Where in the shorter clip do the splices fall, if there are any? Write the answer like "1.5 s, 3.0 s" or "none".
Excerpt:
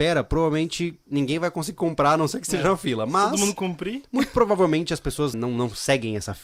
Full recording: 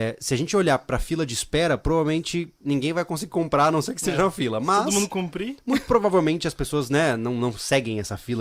5.3 s